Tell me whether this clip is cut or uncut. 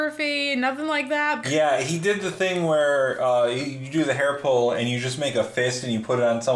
cut